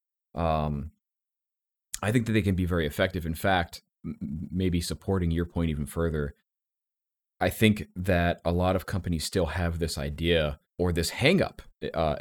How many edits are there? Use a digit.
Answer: 1